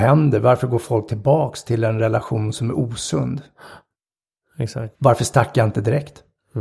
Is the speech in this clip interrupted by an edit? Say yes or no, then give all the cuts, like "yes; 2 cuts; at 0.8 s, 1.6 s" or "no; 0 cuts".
yes; 1 cut; at 4.9 s